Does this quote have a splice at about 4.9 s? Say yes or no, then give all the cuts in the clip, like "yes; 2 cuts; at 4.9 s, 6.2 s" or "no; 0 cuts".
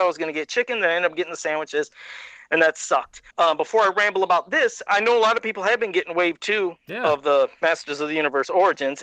yes; 2 cuts; at 3.3 s, 4.9 s